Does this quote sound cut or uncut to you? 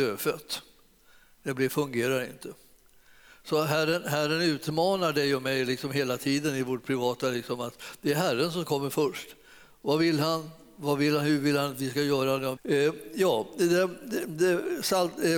cut